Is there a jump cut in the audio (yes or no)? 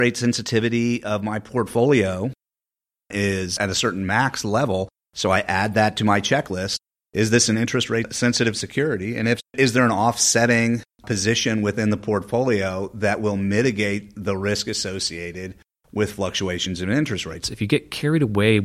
yes